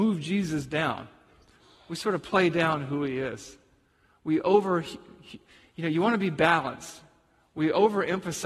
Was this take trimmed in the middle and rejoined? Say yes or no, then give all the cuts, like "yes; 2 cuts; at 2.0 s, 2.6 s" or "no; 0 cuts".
no; 0 cuts